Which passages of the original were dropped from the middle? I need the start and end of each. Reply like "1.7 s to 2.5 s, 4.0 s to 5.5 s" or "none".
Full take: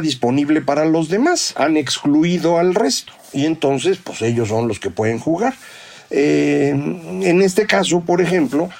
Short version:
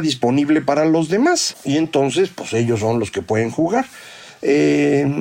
1.5 s to 3.2 s